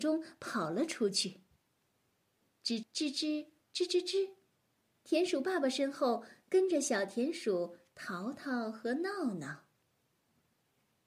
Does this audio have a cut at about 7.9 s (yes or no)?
no